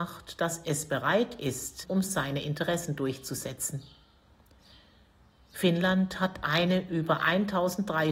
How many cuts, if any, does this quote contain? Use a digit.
1